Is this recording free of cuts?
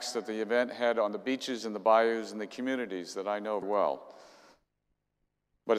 no; 1 cut; at 3.6 s

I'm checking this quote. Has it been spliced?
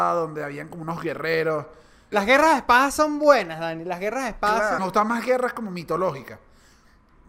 yes; 2 cuts; at 2.1 s, 4.8 s

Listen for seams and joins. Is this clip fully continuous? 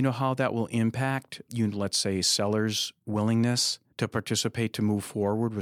no; 2 cuts; at 1.5 s, 3.9 s

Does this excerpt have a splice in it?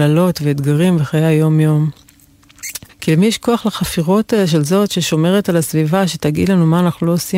yes; 1 cut; at 2.9 s

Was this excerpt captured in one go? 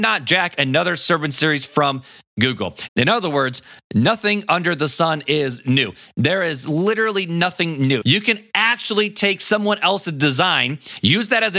no; 2 cuts; at 2.9 s, 8.0 s

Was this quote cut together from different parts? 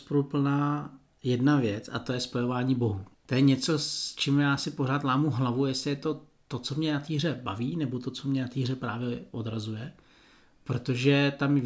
no; 0 cuts

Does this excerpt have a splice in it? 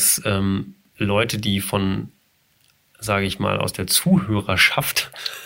no; 0 cuts

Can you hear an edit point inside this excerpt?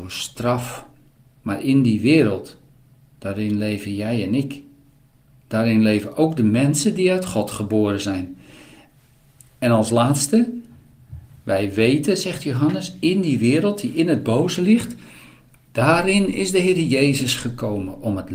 no; 0 cuts

